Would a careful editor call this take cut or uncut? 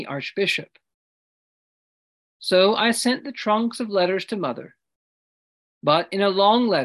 uncut